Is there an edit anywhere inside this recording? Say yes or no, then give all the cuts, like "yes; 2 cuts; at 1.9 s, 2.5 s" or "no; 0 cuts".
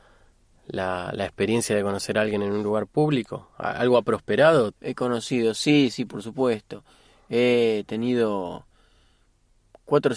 yes; 1 cut; at 4.7 s